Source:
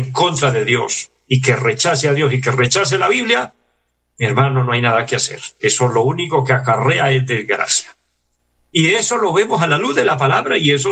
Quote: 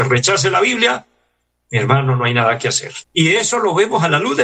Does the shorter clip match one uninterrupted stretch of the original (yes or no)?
no